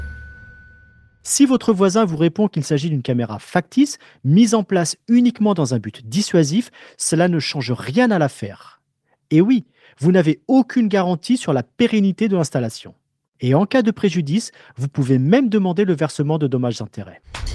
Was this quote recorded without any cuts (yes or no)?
no